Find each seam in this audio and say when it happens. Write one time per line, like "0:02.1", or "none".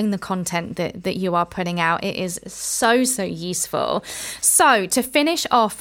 none